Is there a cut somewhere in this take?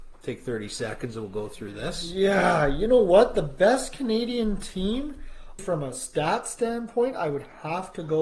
yes; 1 cut; at 5.6 s

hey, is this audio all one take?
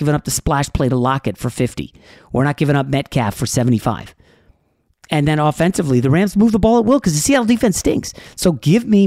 yes; 0 cuts

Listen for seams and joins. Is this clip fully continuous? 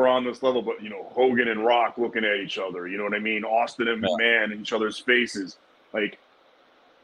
yes; 0 cuts

